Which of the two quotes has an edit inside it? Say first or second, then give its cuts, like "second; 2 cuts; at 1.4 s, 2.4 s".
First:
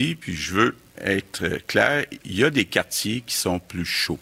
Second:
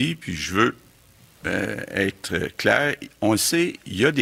first; 2 cuts; at 1.0 s, 2.2 s